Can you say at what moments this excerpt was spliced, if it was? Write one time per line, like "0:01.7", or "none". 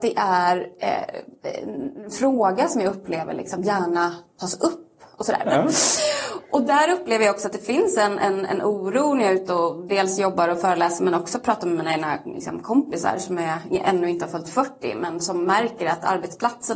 0:05.4